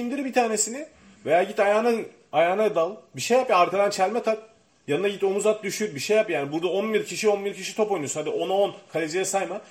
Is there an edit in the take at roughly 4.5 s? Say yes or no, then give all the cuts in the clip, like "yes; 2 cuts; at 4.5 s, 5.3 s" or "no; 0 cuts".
no; 0 cuts